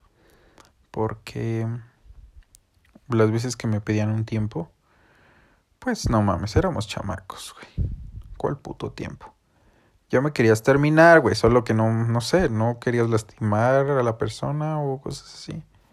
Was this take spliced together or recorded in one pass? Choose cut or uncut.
uncut